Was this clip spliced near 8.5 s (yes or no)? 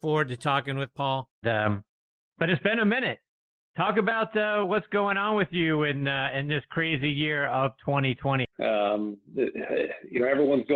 yes